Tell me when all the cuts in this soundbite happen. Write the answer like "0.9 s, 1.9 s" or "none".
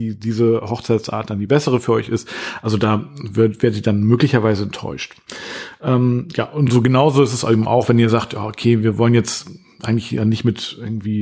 none